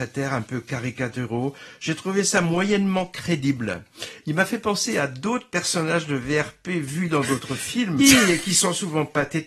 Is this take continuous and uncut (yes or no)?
no